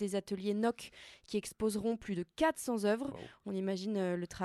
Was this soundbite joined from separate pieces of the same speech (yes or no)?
no